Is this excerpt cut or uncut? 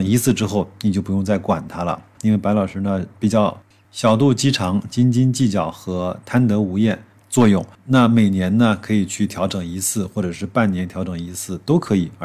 cut